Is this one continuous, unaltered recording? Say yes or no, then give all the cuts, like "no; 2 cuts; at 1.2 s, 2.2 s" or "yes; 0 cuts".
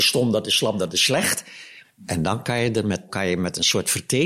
no; 2 cuts; at 1.8 s, 3.1 s